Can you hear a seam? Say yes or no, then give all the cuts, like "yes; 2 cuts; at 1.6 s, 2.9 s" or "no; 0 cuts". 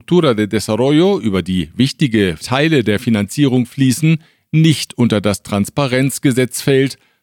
no; 0 cuts